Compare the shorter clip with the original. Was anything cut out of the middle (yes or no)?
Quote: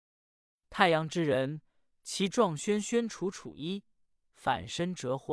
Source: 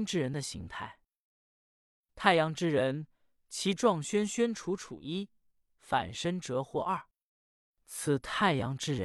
no